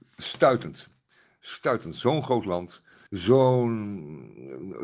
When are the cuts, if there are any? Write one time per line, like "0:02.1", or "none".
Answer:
0:03.1